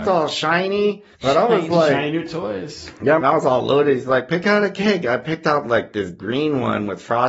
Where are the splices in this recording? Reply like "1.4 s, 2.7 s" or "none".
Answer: 1.1 s, 3.2 s